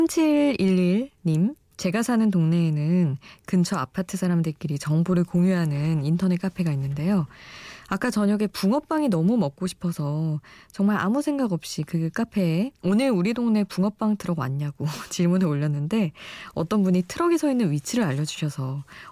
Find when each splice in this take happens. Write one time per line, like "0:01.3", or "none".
0:01.6
0:12.7